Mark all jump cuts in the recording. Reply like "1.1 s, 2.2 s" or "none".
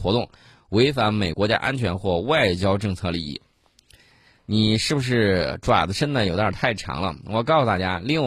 1.3 s